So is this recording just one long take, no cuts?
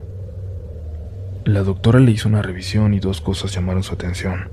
yes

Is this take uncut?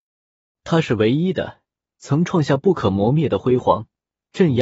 no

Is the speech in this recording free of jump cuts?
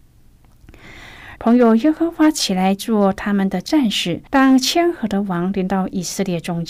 no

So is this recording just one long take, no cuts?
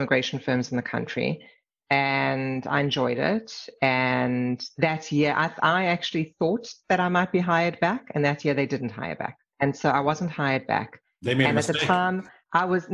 yes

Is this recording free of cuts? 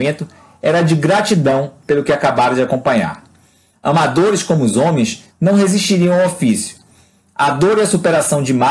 no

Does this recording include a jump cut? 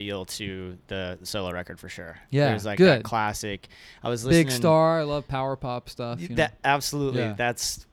no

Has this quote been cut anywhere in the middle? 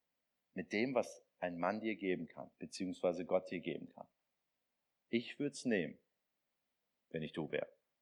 no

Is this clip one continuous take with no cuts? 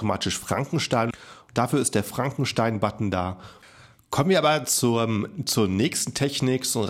no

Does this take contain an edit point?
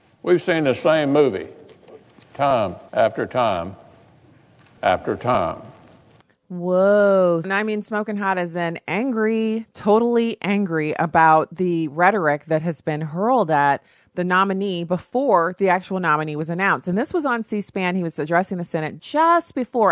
yes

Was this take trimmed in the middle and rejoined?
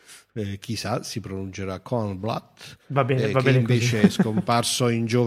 no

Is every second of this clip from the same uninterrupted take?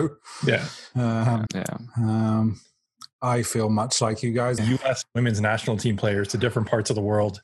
no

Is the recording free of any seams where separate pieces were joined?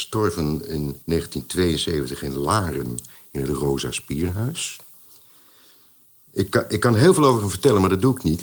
no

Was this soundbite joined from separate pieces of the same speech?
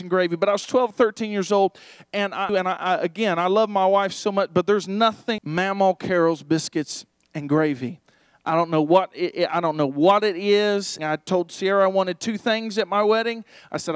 yes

